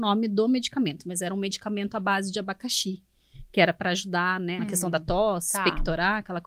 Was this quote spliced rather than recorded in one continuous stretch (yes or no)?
yes